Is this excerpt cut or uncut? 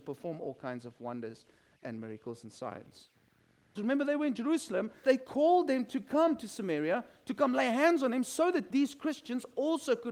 cut